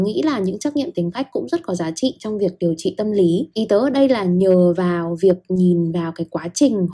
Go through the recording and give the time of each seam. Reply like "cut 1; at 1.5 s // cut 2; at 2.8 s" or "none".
cut 1; at 3.5 s